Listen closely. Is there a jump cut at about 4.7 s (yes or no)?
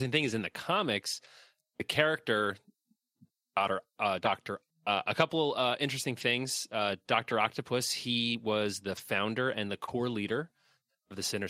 yes